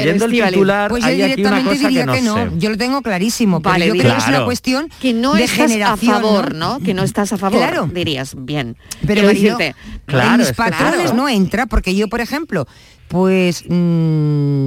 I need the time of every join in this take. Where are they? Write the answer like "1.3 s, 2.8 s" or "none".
10.1 s, 11.1 s, 13.0 s